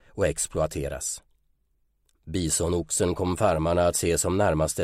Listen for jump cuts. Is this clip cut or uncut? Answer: uncut